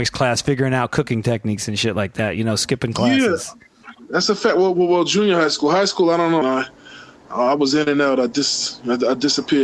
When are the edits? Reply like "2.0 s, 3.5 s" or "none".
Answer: 6.4 s